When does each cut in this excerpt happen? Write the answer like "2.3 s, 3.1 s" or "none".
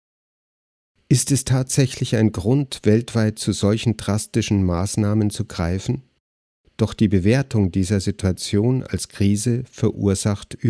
6.6 s